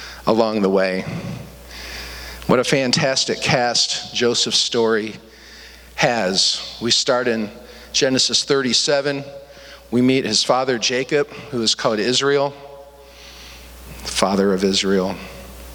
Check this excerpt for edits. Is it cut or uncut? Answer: uncut